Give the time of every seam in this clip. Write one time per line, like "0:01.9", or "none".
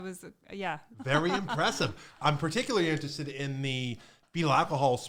0:00.9
0:02.2